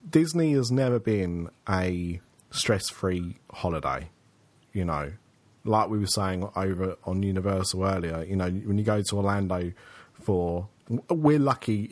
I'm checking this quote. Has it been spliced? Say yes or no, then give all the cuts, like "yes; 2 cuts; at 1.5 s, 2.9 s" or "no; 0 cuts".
no; 0 cuts